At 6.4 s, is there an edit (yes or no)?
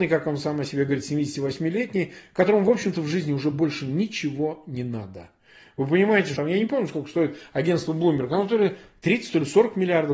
yes